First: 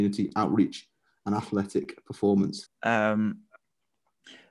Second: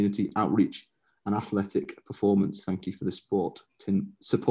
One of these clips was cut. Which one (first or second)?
first